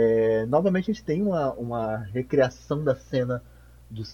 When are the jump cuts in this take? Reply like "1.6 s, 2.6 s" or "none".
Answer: none